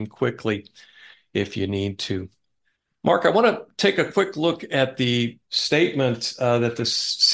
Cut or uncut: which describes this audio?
uncut